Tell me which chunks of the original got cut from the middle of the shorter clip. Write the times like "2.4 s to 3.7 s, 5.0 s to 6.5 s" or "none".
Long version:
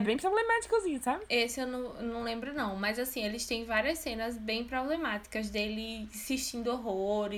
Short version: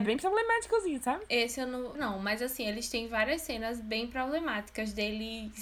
1.9 s to 2.5 s

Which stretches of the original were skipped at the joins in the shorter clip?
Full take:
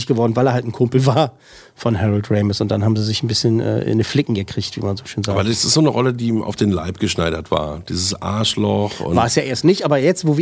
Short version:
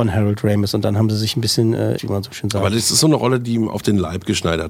3.8 s to 4.7 s

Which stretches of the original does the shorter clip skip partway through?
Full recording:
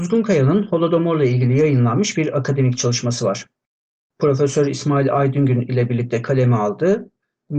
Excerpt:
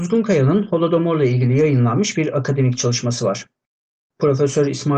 none

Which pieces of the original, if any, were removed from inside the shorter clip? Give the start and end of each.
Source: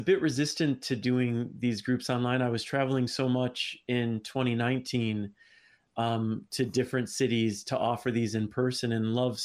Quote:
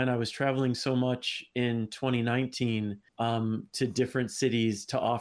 5.4 s to 5.9 s

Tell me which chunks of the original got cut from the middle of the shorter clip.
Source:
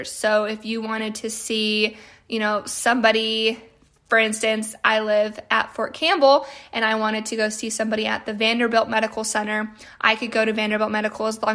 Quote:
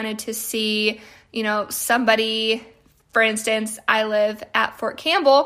none

